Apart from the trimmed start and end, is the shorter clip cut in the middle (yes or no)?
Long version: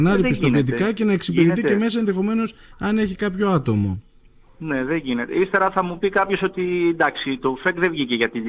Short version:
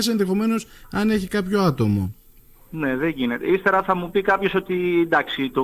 no